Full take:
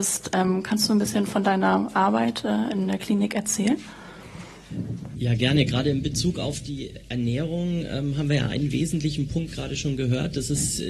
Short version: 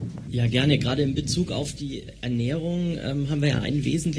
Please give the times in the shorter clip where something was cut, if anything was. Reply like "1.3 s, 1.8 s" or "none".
none

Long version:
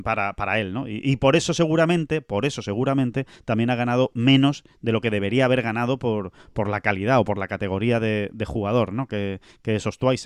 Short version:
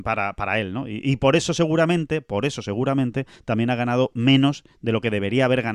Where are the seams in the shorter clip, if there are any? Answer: none

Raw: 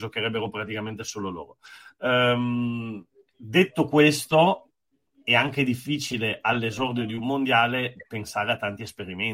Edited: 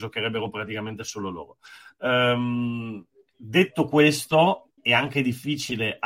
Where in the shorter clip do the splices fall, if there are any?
4.8 s

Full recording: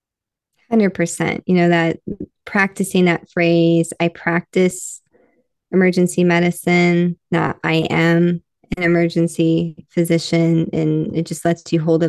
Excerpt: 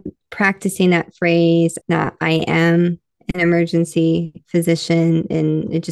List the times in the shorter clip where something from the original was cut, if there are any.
1.8 s

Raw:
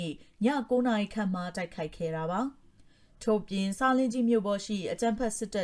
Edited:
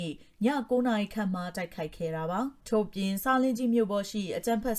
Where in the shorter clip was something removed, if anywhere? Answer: 2.6 s

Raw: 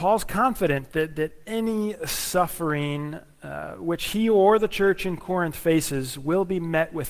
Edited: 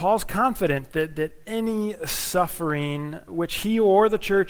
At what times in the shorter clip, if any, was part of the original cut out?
3.3 s

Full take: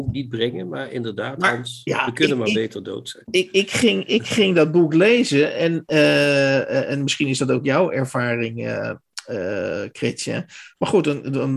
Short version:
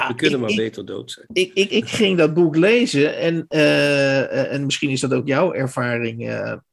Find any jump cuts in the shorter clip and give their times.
1.7 s

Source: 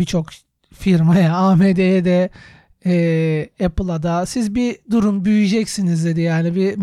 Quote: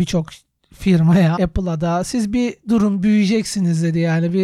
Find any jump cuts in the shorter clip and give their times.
1.4 s

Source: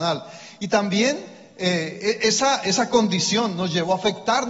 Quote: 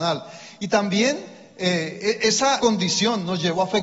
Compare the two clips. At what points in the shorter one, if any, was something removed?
2.6 s

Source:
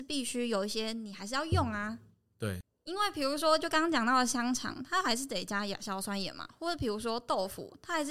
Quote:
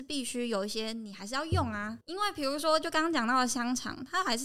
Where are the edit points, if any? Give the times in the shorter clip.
2.0 s

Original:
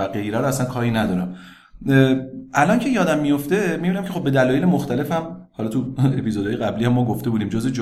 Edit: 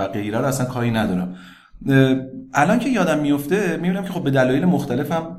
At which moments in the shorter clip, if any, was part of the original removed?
none

